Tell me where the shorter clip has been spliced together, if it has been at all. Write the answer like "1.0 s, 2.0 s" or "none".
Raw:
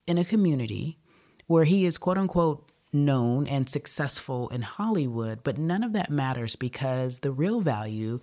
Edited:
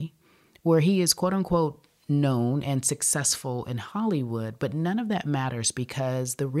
none